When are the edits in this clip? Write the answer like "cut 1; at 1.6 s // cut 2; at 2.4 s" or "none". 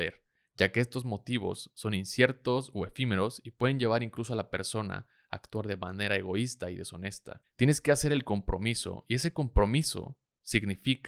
cut 1; at 7.4 s